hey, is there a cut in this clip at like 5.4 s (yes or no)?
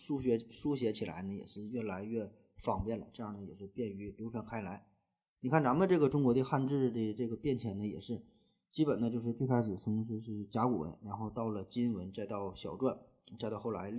yes